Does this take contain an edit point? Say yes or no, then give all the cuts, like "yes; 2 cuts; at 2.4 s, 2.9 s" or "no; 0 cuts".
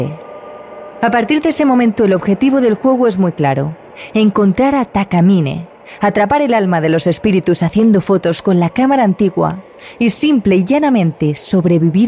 no; 0 cuts